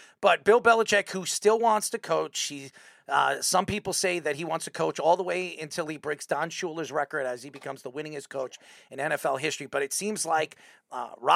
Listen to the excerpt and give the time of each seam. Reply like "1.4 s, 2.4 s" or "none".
none